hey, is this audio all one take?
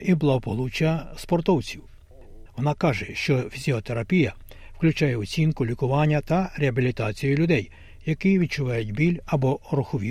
no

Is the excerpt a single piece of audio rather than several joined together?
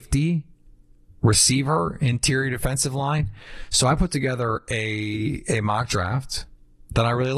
yes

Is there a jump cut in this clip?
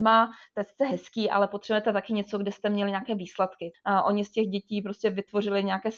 yes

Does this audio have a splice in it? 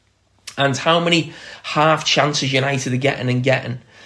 no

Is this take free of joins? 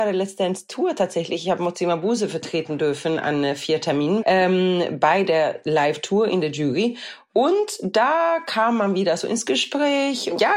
no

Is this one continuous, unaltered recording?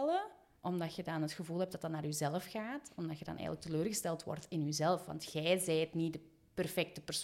yes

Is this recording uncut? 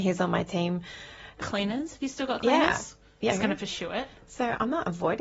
no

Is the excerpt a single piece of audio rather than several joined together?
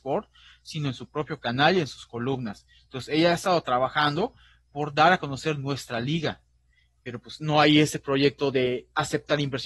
yes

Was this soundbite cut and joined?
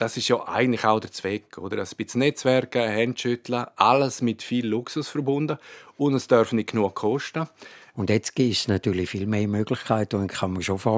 yes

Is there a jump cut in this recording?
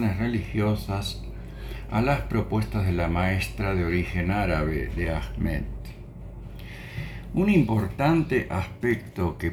no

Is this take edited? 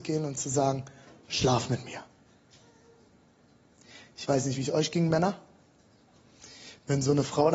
no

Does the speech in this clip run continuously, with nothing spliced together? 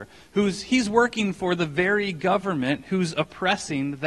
yes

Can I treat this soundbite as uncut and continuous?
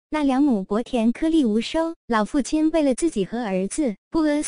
yes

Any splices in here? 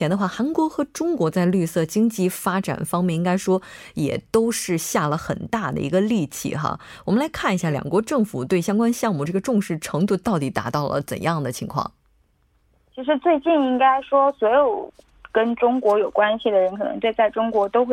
no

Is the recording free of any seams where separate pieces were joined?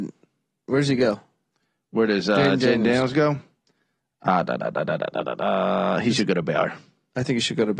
yes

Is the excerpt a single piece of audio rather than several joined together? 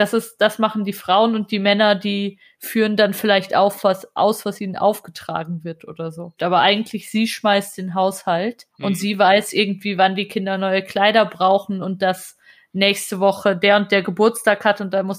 no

